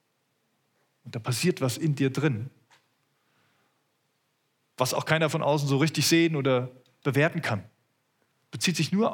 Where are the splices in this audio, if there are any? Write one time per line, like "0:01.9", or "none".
none